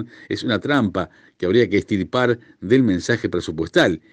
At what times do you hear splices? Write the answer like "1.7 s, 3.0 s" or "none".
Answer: none